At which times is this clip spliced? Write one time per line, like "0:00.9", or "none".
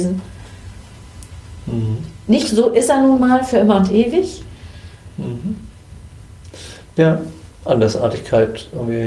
0:07.6